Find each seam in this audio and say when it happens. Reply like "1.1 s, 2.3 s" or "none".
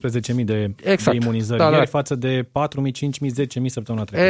none